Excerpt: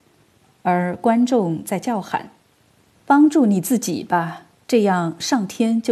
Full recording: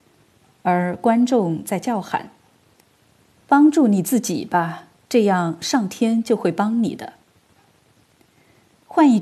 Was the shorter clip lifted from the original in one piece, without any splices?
no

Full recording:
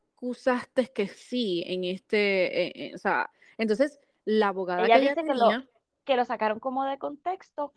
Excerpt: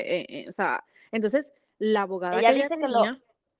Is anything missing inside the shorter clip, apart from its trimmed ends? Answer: no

